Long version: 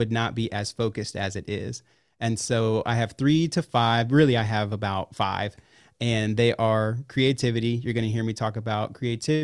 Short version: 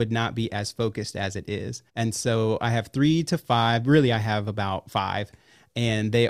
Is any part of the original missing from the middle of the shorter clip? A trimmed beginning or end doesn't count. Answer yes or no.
yes